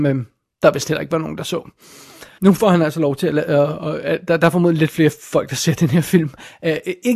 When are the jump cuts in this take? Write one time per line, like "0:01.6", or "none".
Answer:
0:02.4